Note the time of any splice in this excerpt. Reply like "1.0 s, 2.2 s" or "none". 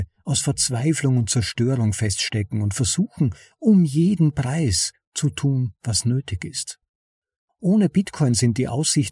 none